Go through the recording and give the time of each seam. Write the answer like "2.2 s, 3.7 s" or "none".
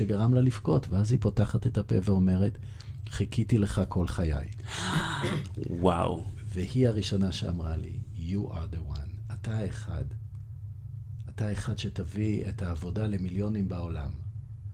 none